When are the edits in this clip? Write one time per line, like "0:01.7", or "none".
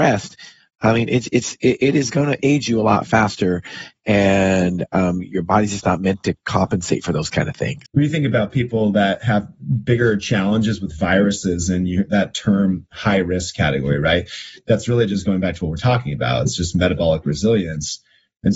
0:07.9